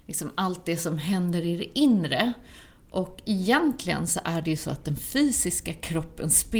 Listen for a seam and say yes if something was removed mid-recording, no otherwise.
no